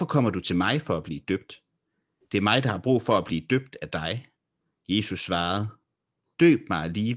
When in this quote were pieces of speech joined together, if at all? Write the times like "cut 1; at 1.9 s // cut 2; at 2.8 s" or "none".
none